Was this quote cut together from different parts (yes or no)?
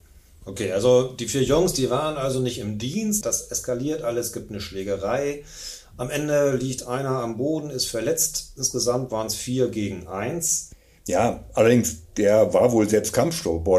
yes